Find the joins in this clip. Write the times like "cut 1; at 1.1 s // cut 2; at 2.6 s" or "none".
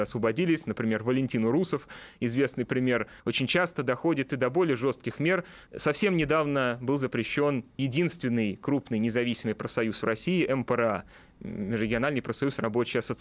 cut 1; at 3.2 s // cut 2; at 5.7 s // cut 3; at 7.8 s